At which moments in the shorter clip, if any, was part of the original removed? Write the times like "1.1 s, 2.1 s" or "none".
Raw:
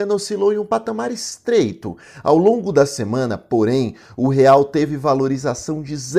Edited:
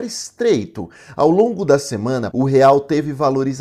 2.3 s